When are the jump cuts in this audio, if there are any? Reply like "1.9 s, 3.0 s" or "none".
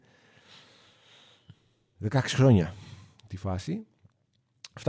none